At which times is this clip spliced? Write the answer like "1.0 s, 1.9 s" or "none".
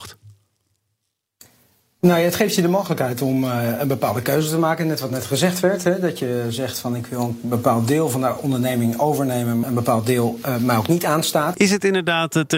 9.6 s, 11.5 s